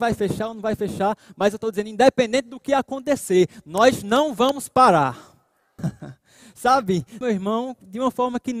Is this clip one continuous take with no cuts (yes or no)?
no